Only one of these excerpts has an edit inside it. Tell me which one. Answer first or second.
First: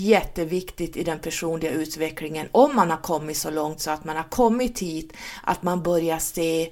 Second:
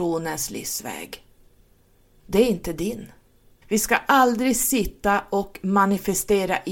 second